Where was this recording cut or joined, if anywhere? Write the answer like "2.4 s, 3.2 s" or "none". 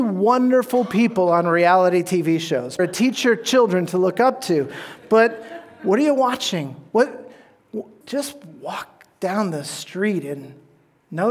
2.8 s, 8.0 s